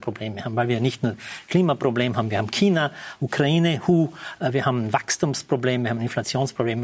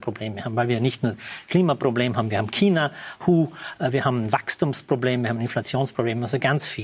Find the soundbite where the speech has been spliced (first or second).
second